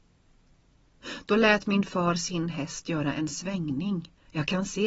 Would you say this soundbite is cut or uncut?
uncut